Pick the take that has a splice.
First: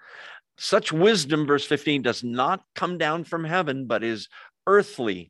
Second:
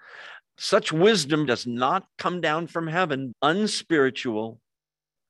second; 2 cuts; at 1.5 s, 3.3 s

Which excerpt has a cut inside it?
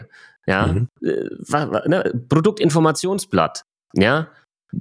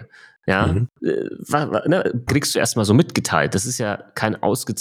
second; 1 cut; at 2.3 s

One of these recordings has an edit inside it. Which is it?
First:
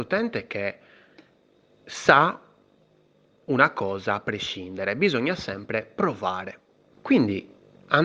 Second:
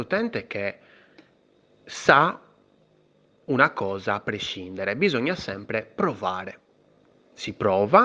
first; 1 cut; at 6.9 s

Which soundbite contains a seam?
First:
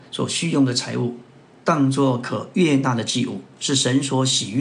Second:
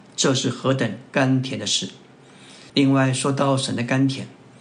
second; 1 cut; at 2.7 s

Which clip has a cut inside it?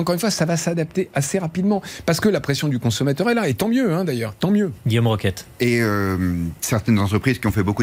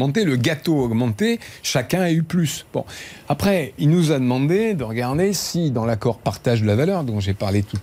second; 1 cut; at 3.8 s

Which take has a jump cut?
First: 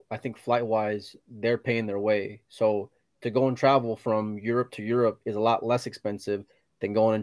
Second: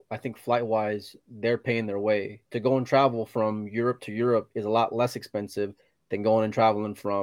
second; 1 cut; at 2.5 s

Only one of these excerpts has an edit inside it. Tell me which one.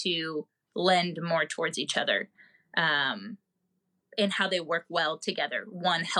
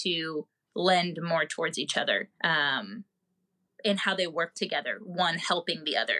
second; 2 cuts; at 2.3 s, 4.5 s

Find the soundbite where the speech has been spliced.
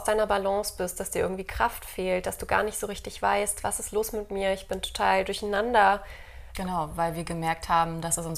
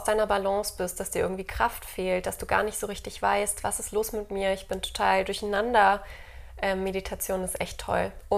first; 1 cut; at 6.5 s

